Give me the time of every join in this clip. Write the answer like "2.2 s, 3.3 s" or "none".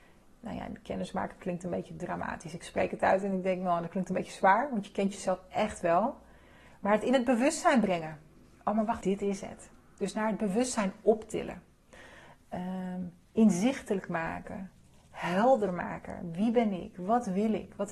9.0 s